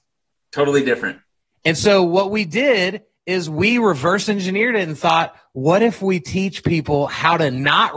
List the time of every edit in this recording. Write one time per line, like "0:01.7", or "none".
none